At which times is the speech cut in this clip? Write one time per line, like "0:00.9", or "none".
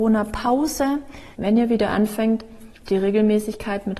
0:01.3